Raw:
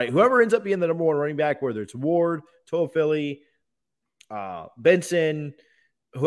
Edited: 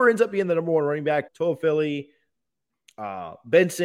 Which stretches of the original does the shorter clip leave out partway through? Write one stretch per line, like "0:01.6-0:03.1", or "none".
0:01.6-0:02.6